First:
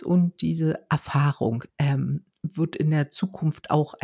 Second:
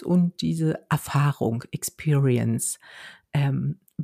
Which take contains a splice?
first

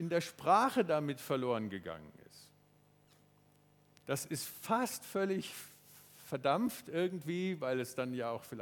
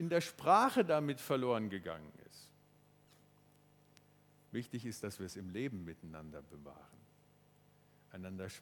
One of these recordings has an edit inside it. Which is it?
first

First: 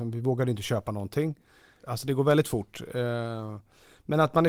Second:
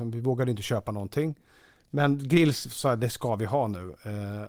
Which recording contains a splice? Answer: first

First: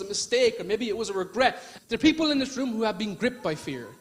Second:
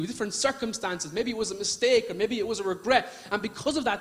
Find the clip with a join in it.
first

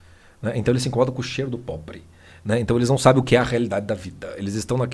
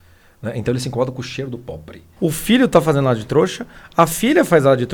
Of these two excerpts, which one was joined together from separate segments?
second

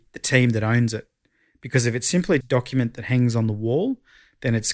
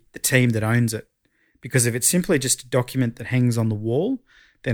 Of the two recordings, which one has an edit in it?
first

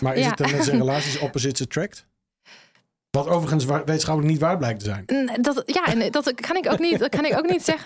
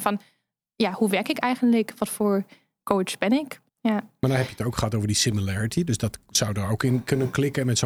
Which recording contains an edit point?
second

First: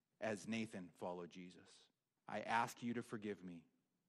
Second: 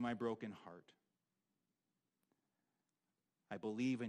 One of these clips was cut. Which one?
first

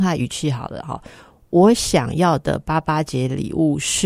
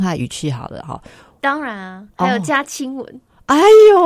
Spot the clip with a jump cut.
second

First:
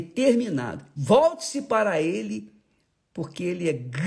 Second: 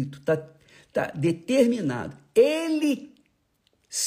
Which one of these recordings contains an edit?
first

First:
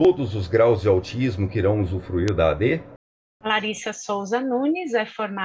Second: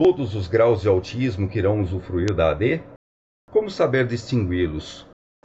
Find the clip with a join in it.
first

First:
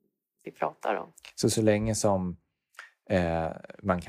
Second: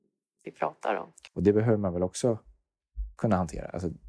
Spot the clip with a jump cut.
second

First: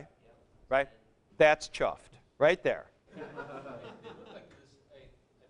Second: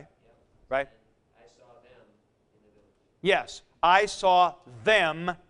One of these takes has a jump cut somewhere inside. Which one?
first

